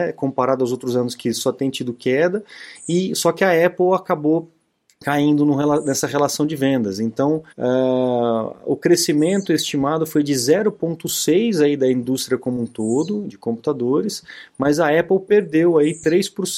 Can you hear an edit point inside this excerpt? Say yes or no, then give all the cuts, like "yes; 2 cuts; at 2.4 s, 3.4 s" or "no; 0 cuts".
yes; 2 cuts; at 7.5 s, 13.3 s